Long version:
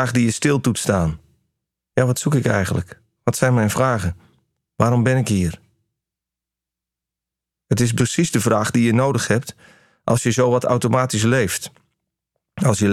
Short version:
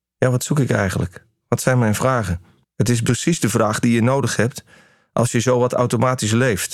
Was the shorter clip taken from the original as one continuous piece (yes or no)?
no